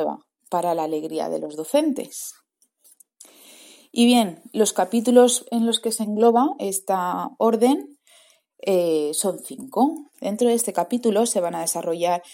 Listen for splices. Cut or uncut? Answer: cut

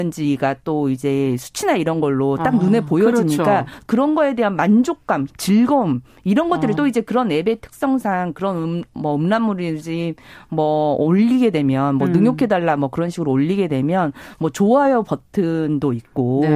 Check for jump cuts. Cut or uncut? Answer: cut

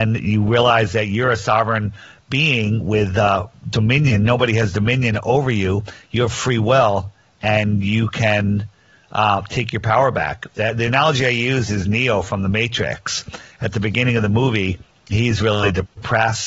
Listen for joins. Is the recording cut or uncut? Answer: uncut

